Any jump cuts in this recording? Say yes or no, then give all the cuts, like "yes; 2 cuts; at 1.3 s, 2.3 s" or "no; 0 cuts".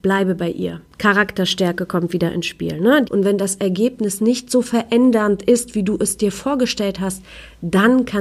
yes; 1 cut; at 3.0 s